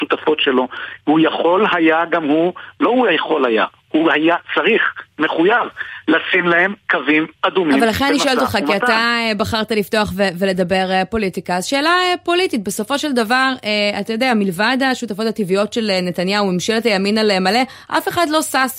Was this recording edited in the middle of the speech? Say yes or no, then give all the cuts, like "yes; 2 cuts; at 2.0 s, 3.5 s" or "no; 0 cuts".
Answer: no; 0 cuts